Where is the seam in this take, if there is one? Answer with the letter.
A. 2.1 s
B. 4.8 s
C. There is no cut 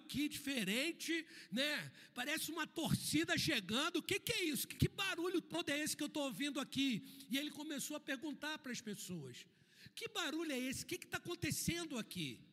B